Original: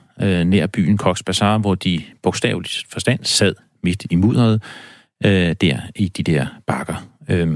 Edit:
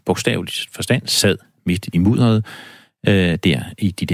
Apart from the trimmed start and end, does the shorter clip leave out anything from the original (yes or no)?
no